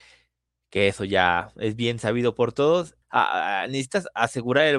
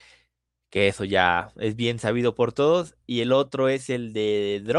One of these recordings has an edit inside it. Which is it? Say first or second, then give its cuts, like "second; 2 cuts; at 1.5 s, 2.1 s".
first; 1 cut; at 3.0 s